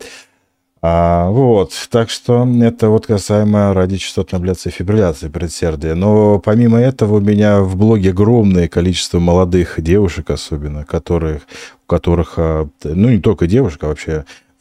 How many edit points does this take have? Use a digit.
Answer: 0